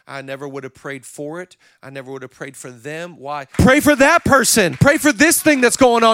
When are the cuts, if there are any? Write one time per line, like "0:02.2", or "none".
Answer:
0:03.5
0:04.8

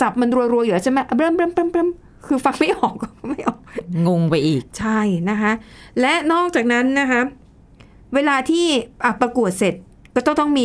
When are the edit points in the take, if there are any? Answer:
none

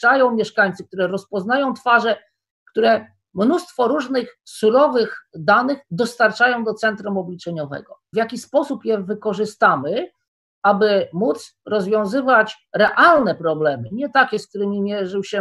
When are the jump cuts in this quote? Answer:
0:08.1

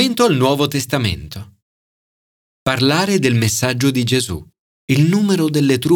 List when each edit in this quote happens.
0:04.8

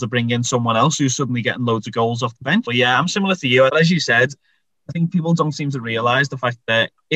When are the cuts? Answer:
0:02.6
0:03.7

